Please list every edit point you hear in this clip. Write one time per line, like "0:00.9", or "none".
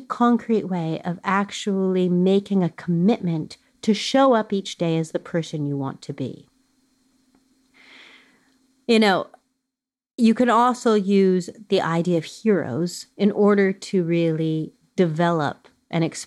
none